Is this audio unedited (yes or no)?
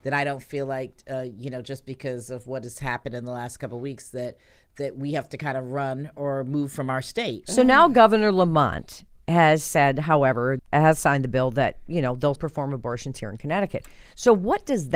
no